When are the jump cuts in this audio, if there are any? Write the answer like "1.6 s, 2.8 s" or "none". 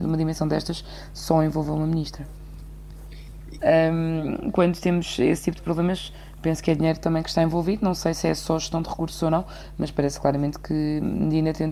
3.6 s